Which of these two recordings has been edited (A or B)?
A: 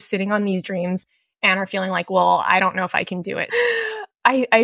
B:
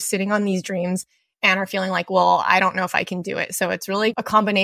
A